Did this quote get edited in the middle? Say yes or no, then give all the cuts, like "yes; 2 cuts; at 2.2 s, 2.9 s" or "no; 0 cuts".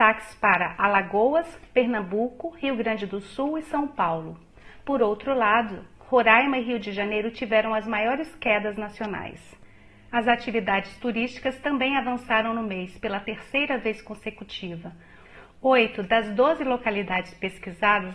no; 0 cuts